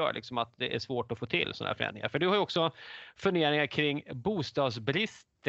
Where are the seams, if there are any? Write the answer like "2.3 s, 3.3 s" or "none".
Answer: none

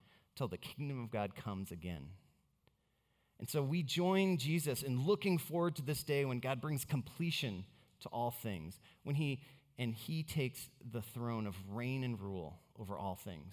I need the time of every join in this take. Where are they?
9.6 s

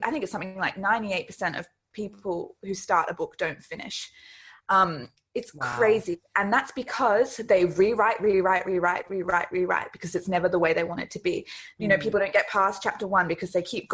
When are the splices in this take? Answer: none

